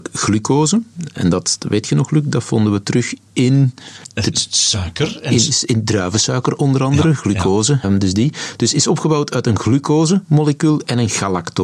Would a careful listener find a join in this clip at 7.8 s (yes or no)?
yes